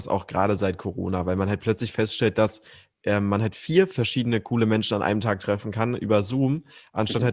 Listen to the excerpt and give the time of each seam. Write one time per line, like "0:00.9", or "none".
none